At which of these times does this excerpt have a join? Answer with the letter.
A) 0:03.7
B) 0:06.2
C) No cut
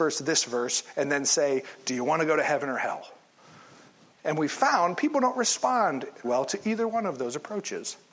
B